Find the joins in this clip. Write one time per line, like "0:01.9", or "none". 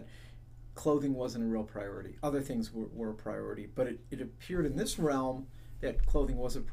none